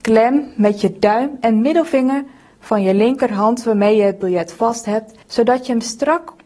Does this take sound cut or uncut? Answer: cut